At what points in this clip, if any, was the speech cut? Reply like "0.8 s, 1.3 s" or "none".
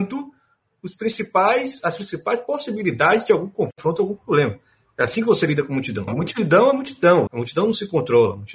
6.1 s, 7.3 s

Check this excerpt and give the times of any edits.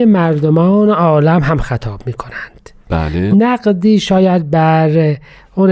3.3 s

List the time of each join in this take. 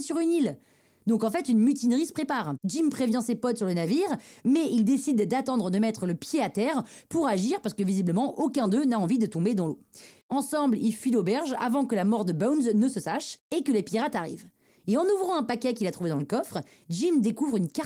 10.2 s

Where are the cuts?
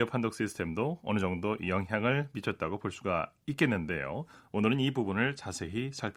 none

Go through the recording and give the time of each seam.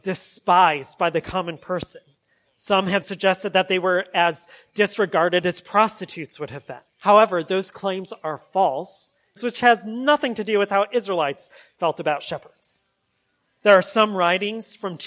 3.0 s, 6.9 s, 9.4 s

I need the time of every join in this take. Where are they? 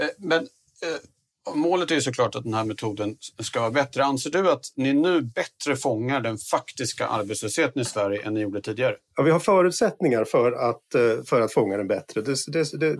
none

